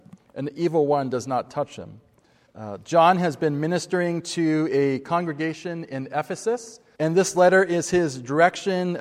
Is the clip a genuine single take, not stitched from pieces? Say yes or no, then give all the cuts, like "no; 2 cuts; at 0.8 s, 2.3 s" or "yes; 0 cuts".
no; 2 cuts; at 2.5 s, 6.9 s